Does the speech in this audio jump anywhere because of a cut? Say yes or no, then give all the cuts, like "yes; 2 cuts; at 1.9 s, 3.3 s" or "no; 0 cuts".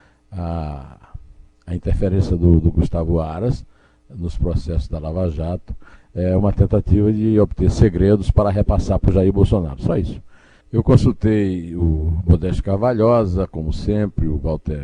yes; 1 cut; at 10.6 s